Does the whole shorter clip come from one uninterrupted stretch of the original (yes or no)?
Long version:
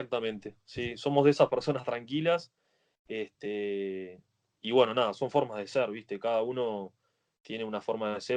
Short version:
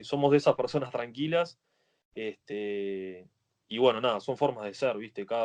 yes